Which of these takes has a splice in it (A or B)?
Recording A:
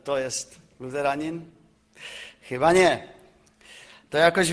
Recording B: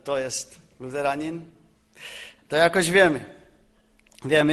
B